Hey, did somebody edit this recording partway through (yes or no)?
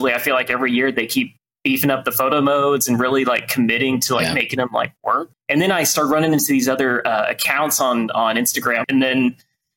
yes